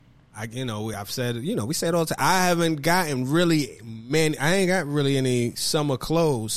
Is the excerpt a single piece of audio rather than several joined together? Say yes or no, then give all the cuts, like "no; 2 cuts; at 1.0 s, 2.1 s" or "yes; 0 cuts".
yes; 0 cuts